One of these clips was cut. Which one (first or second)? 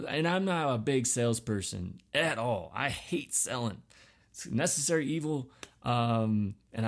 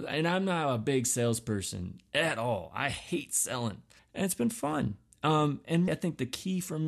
second